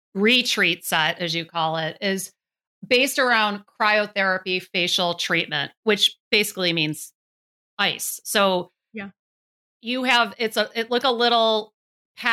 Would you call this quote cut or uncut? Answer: cut